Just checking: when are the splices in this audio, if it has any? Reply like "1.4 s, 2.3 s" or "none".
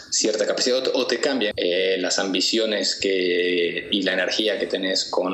1.5 s